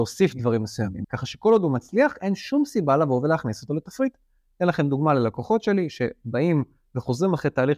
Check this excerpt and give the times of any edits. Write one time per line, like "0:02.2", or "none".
0:01.0